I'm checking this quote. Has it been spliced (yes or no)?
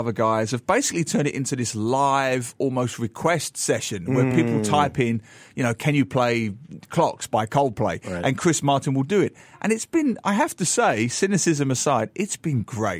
no